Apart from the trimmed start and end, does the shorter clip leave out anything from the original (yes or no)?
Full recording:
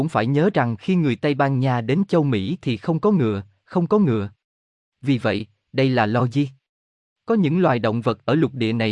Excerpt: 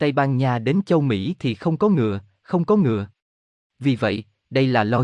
no